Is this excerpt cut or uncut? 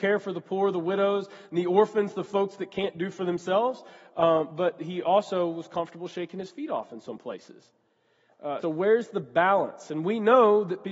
cut